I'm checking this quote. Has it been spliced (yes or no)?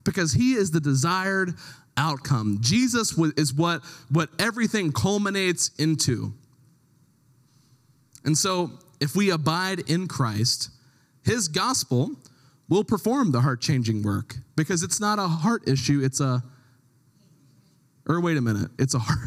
no